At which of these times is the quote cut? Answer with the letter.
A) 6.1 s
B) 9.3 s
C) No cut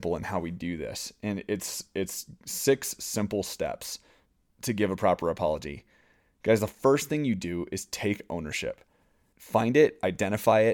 B